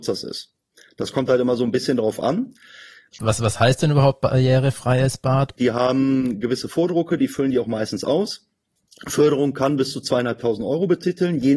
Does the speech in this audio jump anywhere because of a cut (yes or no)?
yes